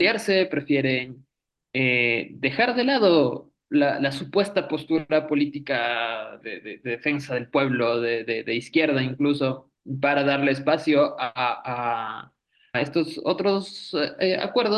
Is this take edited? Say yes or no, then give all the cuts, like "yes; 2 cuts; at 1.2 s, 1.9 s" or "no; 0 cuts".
yes; 2 cuts; at 6.4 s, 12.7 s